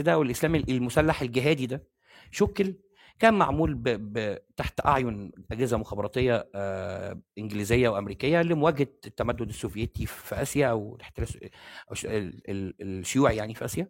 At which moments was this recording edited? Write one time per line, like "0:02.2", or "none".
none